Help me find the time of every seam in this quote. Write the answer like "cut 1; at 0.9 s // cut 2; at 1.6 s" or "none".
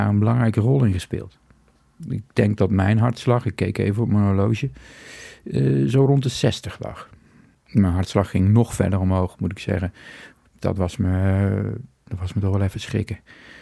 cut 1; at 2.0 s // cut 2; at 10.5 s // cut 3; at 12.1 s